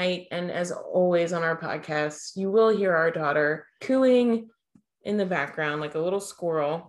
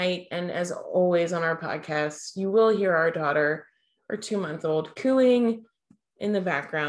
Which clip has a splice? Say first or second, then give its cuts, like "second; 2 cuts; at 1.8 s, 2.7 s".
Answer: first; 1 cut; at 3.8 s